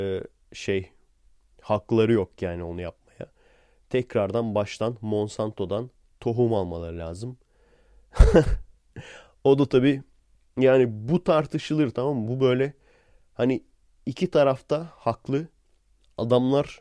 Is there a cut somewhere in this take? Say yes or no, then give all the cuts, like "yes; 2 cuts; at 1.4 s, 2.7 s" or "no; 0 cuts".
no; 0 cuts